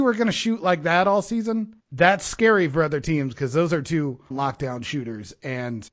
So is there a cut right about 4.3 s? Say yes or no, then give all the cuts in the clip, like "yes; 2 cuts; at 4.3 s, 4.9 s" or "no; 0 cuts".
yes; 1 cut; at 4.3 s